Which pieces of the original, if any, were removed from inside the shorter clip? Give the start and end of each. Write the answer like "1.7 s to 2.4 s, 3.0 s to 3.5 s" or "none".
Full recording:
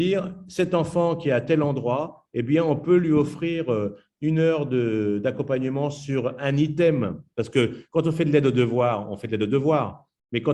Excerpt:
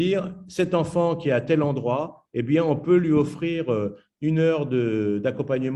none